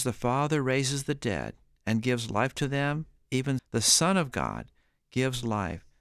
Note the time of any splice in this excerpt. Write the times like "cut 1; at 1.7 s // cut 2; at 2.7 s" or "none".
cut 1; at 3.6 s